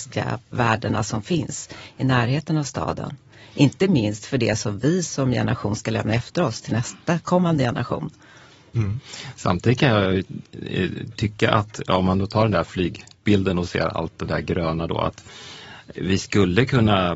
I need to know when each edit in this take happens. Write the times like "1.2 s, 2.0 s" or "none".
none